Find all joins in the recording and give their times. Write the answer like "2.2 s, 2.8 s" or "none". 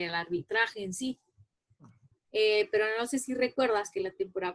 2.1 s